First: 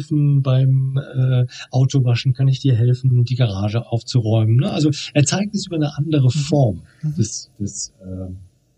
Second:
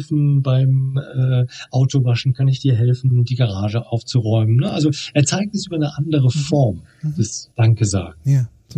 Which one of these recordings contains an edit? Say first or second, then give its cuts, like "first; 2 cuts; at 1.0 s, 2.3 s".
second; 1 cut; at 7.5 s